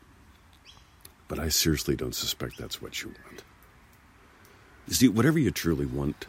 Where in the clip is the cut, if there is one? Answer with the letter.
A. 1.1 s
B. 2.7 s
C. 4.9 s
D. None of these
C